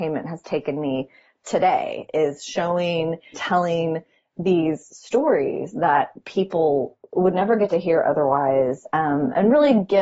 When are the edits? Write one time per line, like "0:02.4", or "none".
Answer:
0:03.3